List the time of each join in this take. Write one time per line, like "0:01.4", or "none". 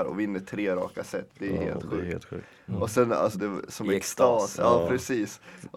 0:03.3